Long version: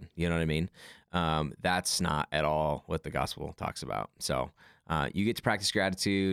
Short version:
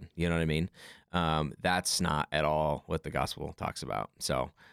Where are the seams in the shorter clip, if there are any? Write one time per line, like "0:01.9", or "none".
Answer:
none